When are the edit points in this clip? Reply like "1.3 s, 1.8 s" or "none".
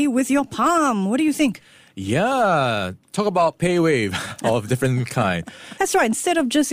5.8 s